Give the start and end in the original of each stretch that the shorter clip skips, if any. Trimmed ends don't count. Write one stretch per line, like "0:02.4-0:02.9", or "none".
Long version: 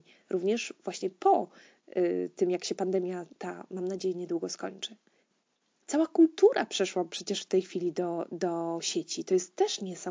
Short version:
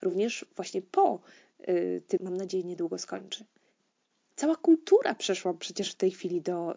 0:02.5-0:03.7